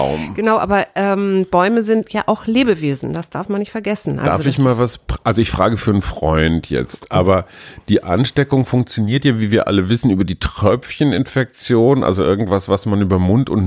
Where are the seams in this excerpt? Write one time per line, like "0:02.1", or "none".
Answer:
none